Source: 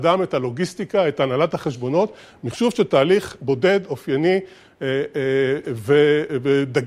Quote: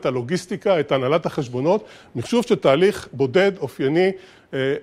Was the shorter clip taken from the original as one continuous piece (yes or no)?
yes